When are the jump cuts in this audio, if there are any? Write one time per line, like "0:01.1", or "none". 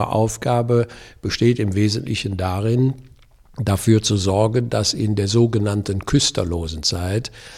none